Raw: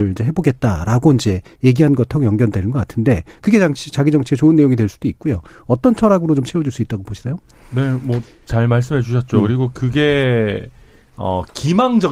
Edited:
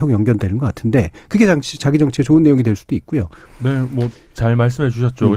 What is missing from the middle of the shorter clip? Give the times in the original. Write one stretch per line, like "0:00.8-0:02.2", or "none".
0:05.6-0:07.6